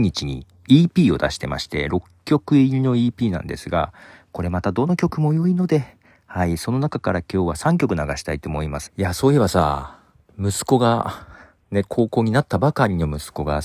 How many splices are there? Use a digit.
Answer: 1